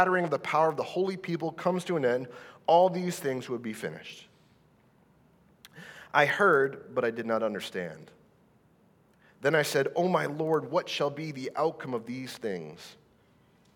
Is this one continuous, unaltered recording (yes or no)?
yes